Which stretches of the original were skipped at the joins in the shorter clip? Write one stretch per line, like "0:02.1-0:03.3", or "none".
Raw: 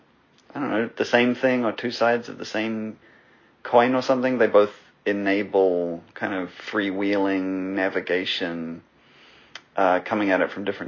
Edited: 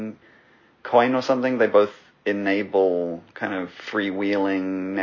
none